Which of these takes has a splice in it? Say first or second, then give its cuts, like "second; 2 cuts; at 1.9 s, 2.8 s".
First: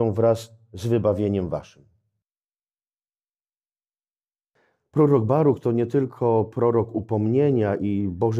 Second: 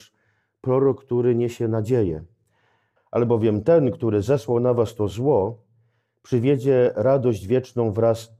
second; 1 cut; at 3.0 s